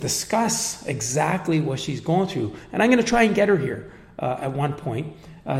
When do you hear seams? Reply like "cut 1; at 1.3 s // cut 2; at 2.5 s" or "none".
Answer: none

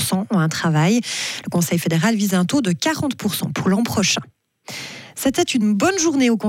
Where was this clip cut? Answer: none

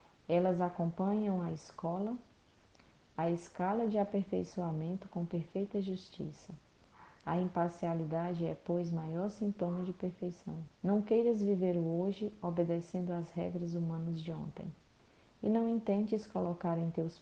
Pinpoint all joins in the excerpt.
cut 1; at 10.8 s

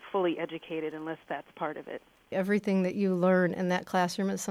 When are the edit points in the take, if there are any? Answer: cut 1; at 2.3 s

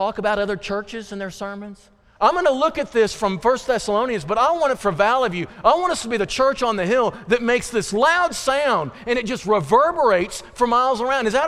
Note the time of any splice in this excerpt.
cut 1; at 2.1 s

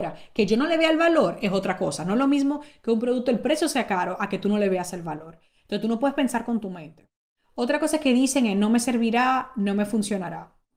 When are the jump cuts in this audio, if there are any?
none

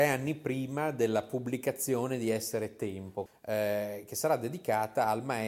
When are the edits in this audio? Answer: cut 1; at 3.3 s

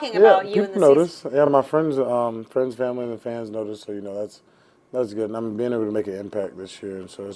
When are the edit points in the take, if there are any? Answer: none

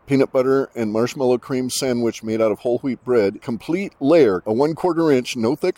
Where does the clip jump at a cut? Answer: cut 1; at 3.4 s // cut 2; at 4.4 s

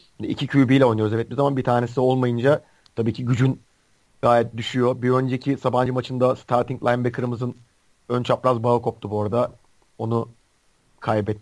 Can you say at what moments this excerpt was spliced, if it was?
none

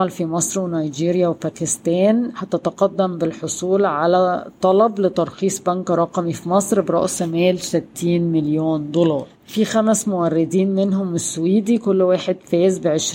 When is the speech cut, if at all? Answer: cut 1; at 9.3 s

